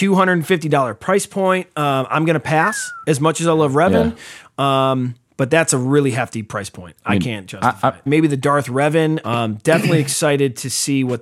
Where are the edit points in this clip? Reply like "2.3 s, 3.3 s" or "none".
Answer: 8.1 s, 9.2 s